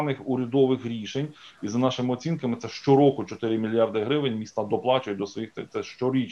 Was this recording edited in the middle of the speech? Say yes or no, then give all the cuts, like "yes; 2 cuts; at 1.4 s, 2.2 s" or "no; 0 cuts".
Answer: yes; 1 cut; at 1.4 s